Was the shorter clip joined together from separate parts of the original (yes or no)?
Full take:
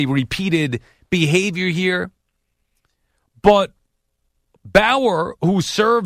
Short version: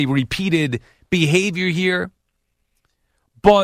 no